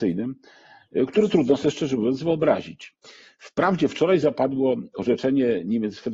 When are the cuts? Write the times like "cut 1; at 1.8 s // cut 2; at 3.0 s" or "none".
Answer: none